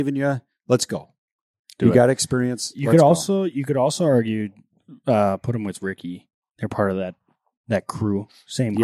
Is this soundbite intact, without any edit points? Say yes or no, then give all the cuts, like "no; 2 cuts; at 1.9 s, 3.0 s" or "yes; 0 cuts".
no; 1 cut; at 6.5 s